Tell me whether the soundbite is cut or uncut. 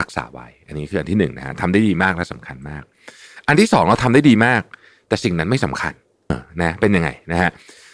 cut